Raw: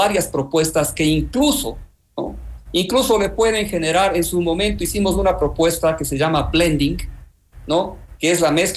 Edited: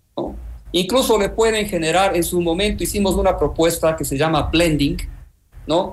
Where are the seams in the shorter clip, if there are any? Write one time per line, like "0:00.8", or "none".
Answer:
none